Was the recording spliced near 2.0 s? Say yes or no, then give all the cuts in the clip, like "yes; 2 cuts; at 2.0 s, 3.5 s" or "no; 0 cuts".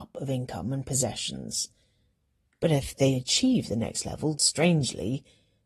no; 1 cut; at 4.3 s